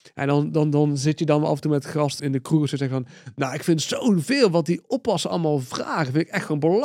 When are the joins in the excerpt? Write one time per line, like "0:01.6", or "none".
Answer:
0:02.2